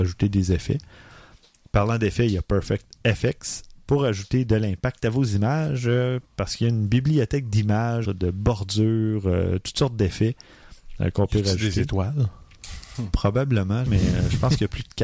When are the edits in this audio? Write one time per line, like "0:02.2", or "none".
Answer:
0:08.0
0:13.9